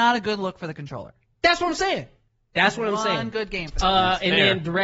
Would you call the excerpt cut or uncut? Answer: uncut